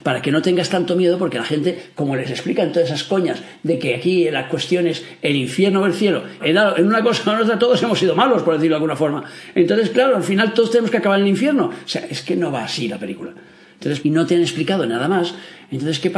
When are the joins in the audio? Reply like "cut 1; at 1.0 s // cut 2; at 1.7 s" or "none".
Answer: cut 1; at 6.4 s // cut 2; at 14.0 s